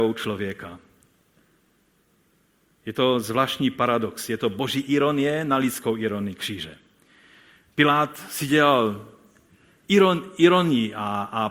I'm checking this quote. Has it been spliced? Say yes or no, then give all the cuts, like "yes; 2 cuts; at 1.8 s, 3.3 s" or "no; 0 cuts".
no; 0 cuts